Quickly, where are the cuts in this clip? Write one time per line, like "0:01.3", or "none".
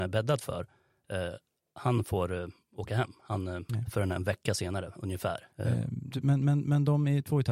0:03.7
0:05.5